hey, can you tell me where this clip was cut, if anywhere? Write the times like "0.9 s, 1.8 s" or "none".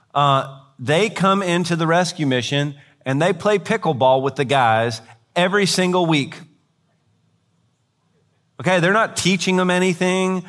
none